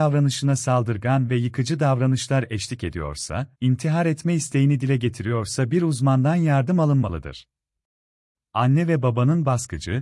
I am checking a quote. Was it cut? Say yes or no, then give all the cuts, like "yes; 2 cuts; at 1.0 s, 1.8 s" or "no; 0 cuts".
yes; 2 cuts; at 3.6 s, 8.3 s